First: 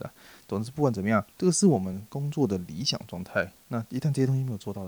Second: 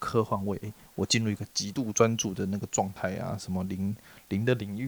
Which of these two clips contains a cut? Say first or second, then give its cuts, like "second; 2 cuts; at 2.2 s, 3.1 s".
first; 2 cuts; at 1.3 s, 3.6 s